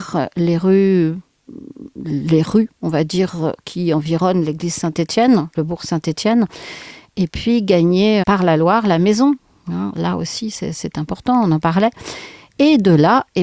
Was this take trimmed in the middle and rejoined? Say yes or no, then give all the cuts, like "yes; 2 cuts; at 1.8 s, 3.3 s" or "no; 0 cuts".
yes; 2 cuts; at 5.5 s, 8.2 s